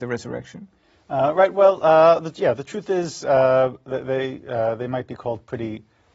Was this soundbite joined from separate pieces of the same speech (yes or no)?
no